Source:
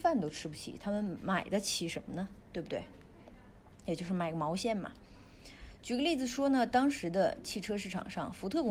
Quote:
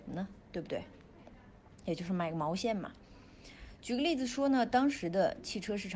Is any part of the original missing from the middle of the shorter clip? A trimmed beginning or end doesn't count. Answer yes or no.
no